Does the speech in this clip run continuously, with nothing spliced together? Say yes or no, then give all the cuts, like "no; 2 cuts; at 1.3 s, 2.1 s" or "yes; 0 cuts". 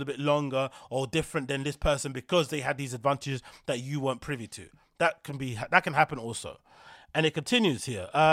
yes; 0 cuts